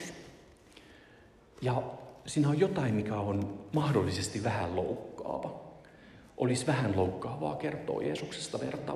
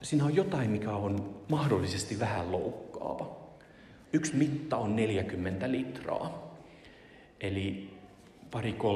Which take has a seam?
second; 1 cut; at 4.0 s

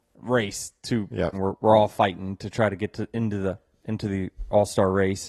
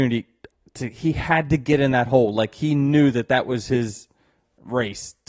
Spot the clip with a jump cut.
first; 1 cut; at 1.3 s

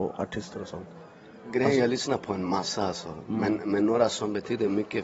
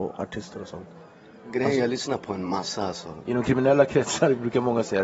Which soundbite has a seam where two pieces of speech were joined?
second; 1 cut; at 3.3 s

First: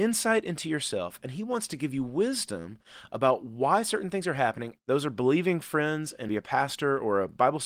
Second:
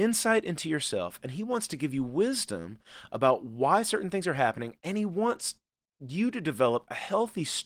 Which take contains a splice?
first; 2 cuts; at 4.8 s, 6.3 s

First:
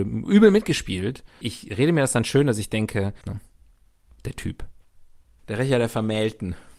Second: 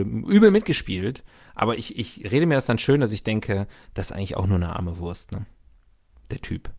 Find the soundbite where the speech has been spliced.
first; 3 cuts; at 1.4 s, 3.2 s, 5.4 s

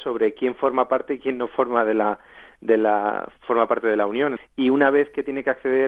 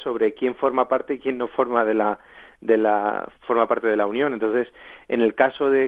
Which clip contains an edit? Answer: first; 1 cut; at 4.4 s

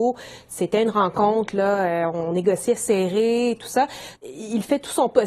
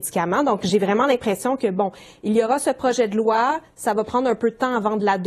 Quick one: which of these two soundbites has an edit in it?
first; 1 cut; at 4.1 s

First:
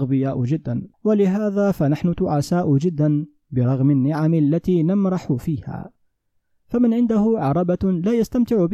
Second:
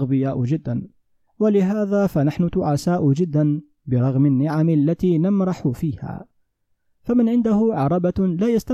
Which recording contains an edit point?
first; 1 cut; at 0.9 s

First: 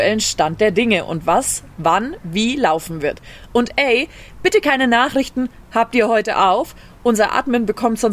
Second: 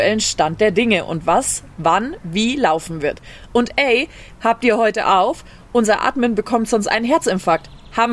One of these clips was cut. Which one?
second; 1 cut; at 4.3 s

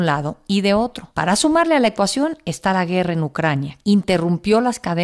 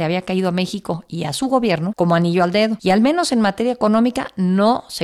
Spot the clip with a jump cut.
first; 1 cut; at 3.8 s

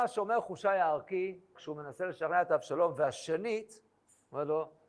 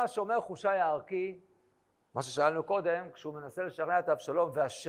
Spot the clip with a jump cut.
first; 1 cut; at 1.5 s

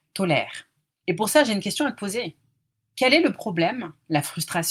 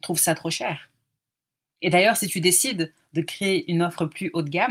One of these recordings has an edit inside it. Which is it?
first; 1 cut; at 1.0 s

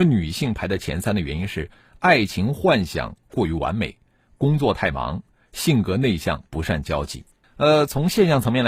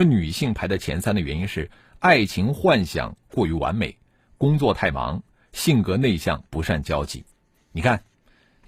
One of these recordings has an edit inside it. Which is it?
first; 1 cut; at 7.4 s

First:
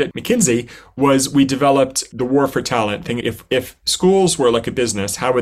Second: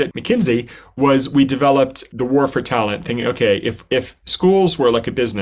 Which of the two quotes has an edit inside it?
first; 1 cut; at 3.2 s

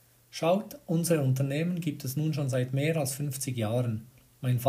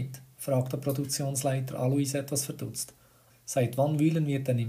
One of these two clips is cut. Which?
second; 1 cut; at 3.3 s

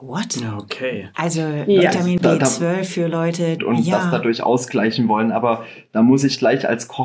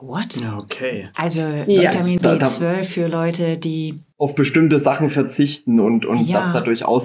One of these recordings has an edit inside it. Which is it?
first; 1 cut; at 3.6 s

